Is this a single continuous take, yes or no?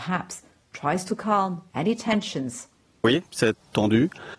yes